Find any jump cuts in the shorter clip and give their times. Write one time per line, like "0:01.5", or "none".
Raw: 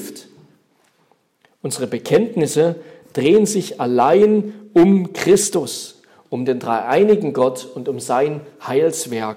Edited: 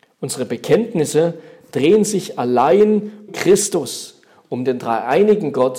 0:03.3